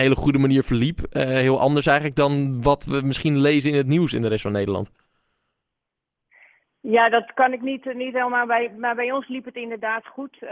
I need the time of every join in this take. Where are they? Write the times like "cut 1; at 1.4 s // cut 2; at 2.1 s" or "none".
none